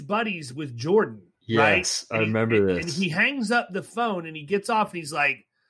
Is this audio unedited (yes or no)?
yes